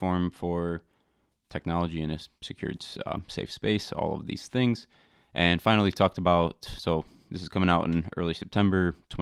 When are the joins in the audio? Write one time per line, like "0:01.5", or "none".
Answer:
none